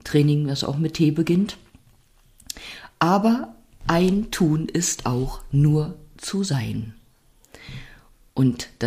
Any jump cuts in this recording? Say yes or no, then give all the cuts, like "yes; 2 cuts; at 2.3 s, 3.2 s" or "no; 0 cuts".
no; 0 cuts